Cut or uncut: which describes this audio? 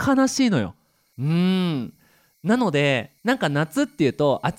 cut